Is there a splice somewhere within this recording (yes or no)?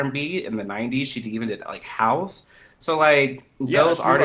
no